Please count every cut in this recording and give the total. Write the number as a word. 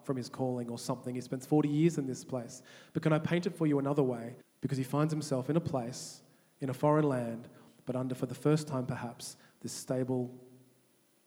one